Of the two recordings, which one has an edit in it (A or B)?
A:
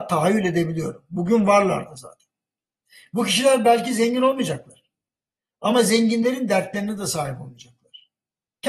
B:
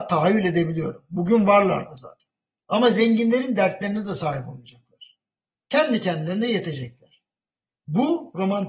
B